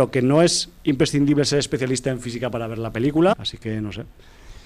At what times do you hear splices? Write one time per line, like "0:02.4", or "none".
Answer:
0:03.3